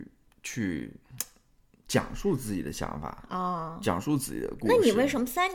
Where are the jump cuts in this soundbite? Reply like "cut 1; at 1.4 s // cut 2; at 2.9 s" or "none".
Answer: none